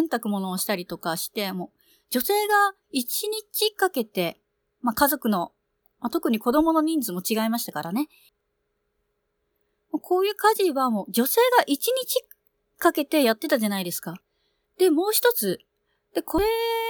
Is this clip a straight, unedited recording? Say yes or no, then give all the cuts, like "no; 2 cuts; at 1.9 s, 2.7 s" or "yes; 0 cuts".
no; 1 cut; at 14.6 s